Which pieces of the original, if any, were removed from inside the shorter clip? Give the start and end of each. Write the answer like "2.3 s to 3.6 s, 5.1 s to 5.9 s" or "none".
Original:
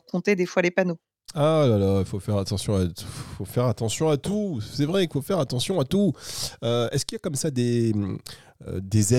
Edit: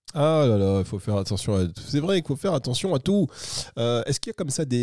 3.0 s to 4.6 s